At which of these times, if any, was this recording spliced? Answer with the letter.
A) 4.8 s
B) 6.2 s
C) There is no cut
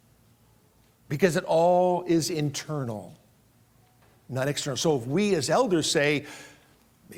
C